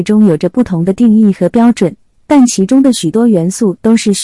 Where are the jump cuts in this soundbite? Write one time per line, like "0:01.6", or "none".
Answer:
0:02.2